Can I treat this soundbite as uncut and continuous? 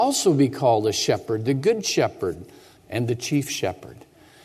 no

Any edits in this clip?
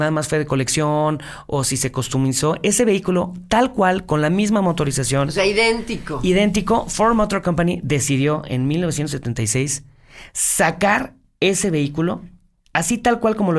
no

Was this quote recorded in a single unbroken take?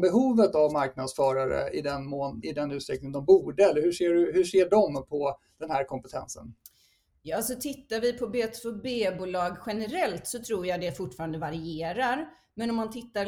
no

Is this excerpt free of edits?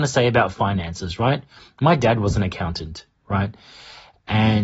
yes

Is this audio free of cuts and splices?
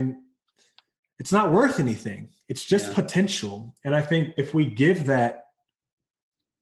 yes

